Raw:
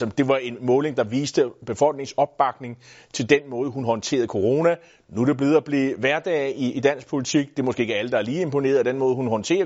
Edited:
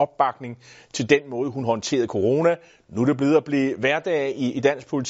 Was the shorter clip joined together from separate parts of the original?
no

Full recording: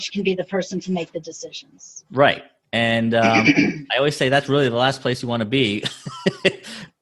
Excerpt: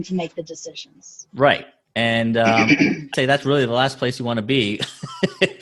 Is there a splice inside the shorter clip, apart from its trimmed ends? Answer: yes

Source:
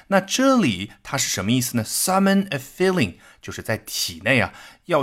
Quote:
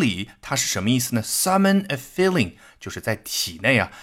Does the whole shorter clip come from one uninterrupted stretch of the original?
yes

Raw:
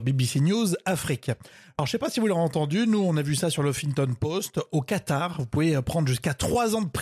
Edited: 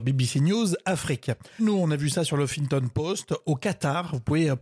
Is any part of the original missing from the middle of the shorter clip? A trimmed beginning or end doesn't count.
yes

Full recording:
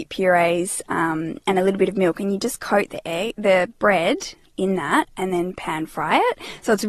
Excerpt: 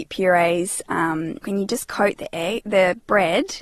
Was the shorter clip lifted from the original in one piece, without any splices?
no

